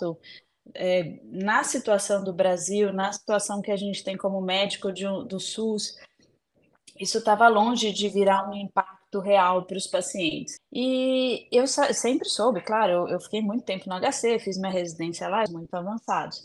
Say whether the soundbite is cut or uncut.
cut